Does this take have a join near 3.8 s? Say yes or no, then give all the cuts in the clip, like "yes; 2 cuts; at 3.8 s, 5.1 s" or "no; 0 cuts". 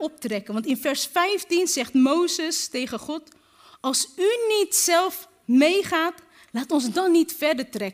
no; 0 cuts